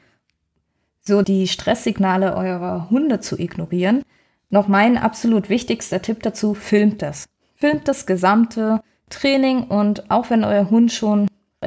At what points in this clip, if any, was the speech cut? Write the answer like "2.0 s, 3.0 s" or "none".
1.2 s